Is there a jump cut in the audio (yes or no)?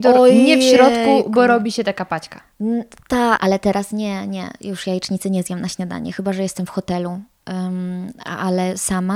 yes